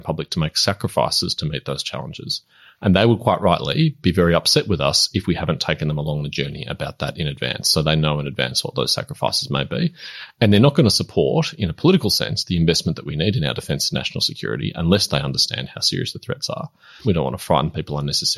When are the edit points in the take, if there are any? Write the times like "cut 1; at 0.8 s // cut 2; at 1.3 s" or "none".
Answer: cut 1; at 17.0 s